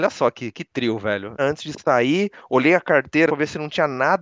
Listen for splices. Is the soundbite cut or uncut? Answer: cut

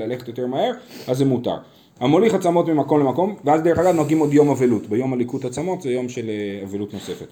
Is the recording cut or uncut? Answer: cut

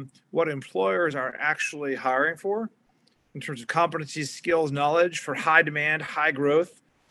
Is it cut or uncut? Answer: uncut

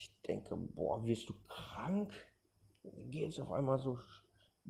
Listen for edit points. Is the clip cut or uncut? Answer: uncut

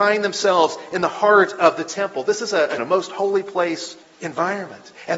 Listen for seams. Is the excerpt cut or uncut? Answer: cut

